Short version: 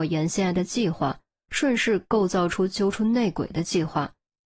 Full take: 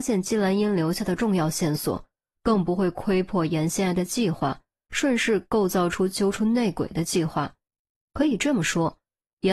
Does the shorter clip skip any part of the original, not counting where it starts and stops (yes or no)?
no